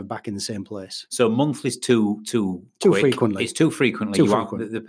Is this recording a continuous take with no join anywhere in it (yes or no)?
yes